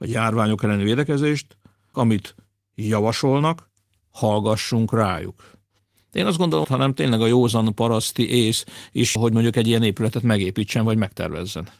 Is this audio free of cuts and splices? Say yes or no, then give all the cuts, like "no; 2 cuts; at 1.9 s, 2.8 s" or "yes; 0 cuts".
no; 3 cuts; at 1.9 s, 6.6 s, 9.2 s